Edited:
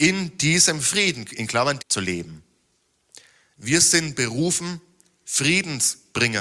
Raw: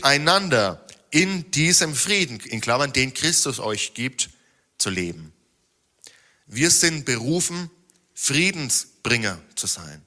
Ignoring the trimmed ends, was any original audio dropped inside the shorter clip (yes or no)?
yes